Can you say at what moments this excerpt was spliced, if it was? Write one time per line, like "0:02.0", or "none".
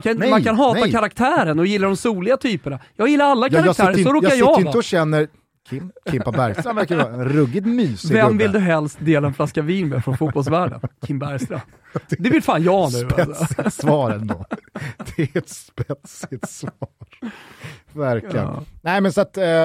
none